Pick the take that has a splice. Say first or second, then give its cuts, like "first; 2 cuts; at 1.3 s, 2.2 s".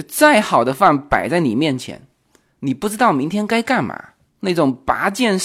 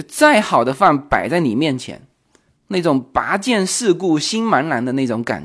second; 1 cut; at 2.5 s